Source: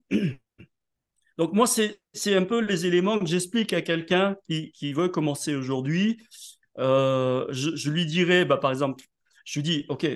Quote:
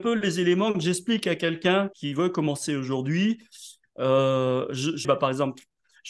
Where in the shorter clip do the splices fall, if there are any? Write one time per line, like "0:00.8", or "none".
0:01.9
0:05.0